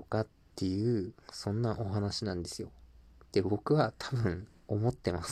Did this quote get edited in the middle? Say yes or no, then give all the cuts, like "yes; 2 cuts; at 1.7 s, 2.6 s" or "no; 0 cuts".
no; 0 cuts